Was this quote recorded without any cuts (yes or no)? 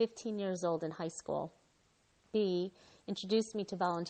no